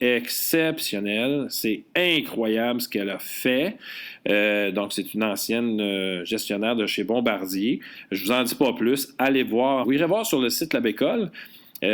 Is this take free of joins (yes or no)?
no